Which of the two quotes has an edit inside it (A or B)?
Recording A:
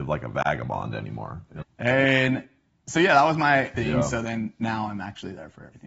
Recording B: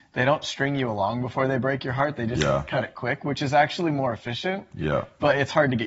A